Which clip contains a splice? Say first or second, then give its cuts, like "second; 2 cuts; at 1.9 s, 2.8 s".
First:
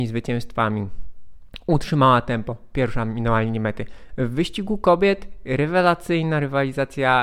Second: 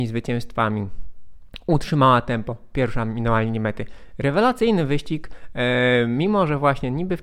first; 1 cut; at 4.1 s